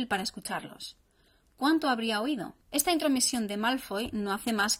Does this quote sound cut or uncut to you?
cut